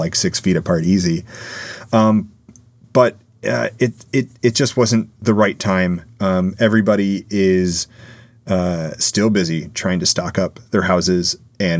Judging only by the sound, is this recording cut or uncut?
uncut